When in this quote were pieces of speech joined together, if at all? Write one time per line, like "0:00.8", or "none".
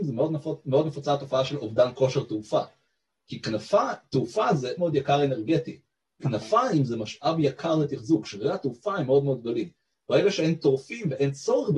0:04.8